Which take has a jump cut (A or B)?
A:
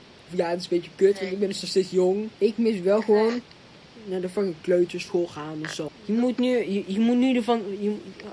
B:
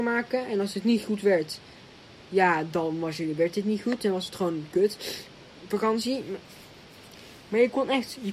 A